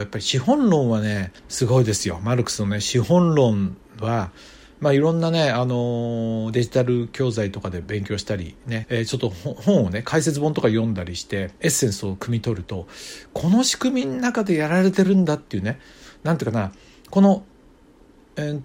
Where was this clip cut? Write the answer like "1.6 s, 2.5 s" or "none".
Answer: 1.4 s, 8.8 s, 11.6 s